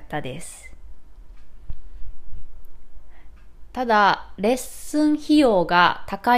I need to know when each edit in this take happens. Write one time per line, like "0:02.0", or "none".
none